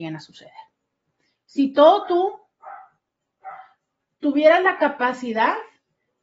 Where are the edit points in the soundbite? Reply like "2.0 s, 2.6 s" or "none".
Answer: 1.3 s